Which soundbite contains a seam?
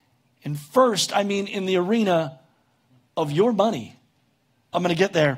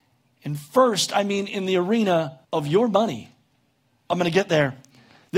second; 1 cut; at 2.4 s

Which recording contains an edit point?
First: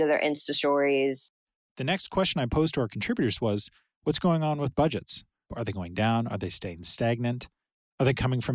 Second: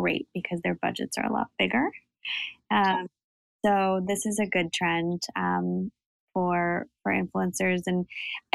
first; 1 cut; at 5.5 s

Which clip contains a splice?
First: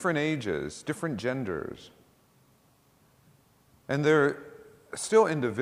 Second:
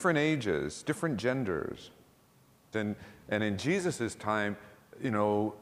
second; 1 cut; at 2.7 s

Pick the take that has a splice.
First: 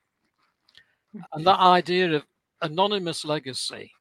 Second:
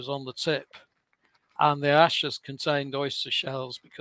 first; 1 cut; at 1.2 s

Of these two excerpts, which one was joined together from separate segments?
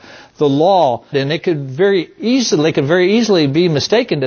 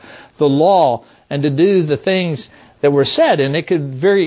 first; 1 cut; at 1.1 s

